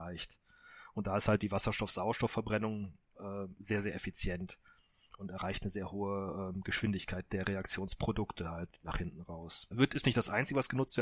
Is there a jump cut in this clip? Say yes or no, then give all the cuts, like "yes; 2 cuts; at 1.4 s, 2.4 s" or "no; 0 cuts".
yes; 1 cut; at 9.7 s